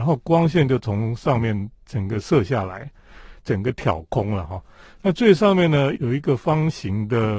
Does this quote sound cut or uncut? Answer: cut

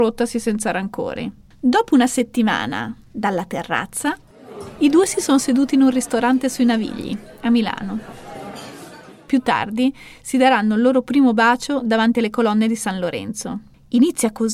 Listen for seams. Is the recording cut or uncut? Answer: uncut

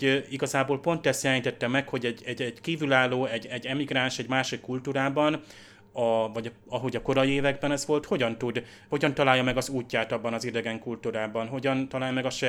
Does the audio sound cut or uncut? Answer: uncut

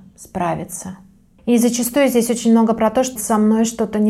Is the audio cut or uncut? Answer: cut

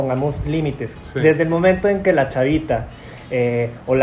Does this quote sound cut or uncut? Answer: uncut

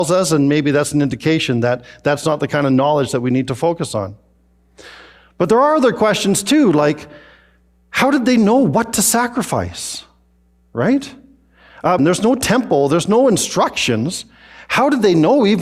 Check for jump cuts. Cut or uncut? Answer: cut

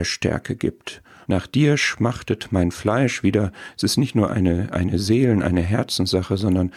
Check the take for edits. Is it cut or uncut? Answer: cut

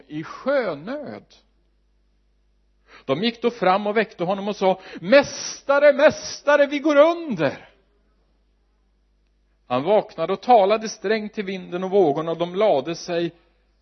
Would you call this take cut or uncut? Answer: uncut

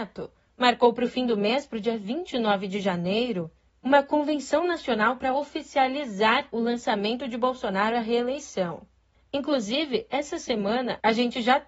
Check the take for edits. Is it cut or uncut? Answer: uncut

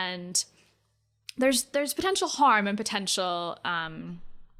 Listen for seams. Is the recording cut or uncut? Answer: uncut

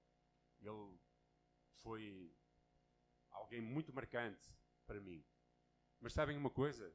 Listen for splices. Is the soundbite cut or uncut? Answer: uncut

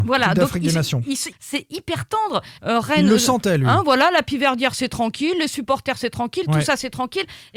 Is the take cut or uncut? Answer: cut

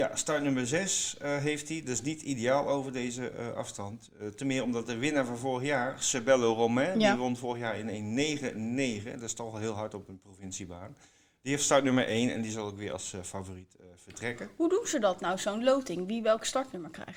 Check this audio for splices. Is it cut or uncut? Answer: uncut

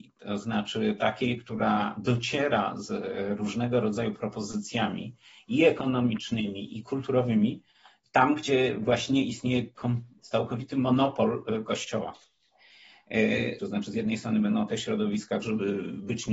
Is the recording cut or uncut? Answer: cut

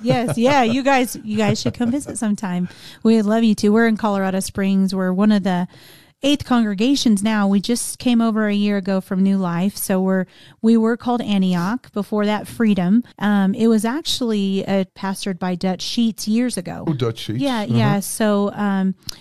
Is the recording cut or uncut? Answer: cut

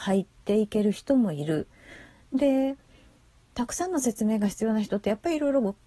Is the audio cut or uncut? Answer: uncut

